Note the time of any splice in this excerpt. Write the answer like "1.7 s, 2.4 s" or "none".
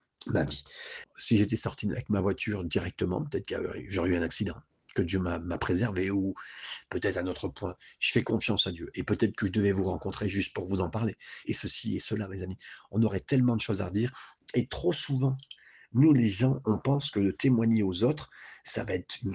1.0 s, 11.4 s